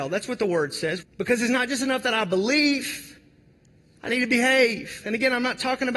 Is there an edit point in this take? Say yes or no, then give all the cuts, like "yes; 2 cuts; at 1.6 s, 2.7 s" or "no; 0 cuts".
yes; 1 cut; at 1.0 s